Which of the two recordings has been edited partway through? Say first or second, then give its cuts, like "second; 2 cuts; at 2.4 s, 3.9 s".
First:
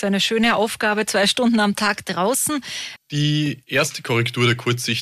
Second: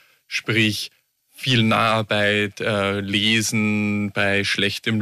first; 1 cut; at 3.0 s